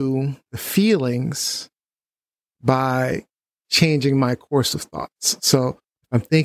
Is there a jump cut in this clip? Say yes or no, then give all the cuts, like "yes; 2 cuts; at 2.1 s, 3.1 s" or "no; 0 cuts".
no; 0 cuts